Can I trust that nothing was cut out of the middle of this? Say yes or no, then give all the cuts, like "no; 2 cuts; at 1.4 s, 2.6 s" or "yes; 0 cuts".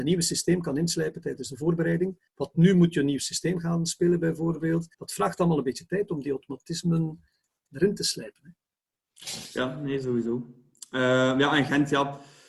no; 2 cuts; at 2.3 s, 4.9 s